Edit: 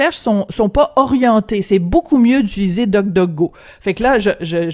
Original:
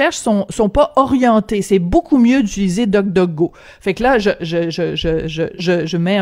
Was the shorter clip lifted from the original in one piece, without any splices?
yes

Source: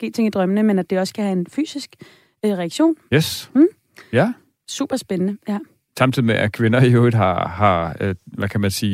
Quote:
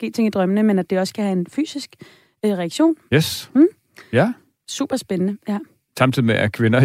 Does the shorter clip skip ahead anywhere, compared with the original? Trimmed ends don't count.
no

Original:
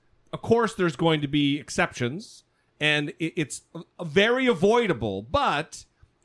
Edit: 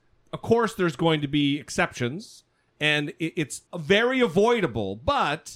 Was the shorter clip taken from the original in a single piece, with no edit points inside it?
no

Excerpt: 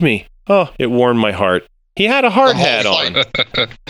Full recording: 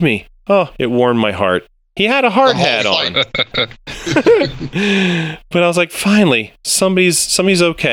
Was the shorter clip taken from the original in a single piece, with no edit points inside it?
yes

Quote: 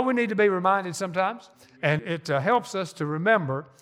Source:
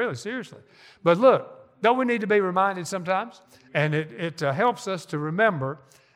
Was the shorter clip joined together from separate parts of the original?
yes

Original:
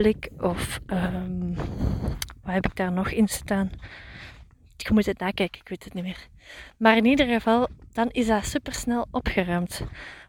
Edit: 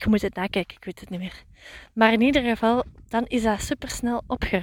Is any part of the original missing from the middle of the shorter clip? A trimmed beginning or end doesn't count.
no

